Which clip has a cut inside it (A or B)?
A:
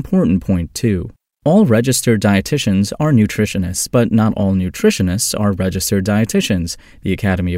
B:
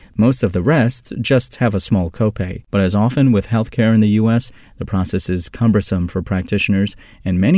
B